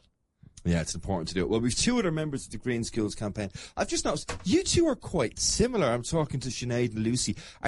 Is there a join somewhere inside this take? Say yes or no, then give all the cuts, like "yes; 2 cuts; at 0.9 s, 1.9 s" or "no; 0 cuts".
no; 0 cuts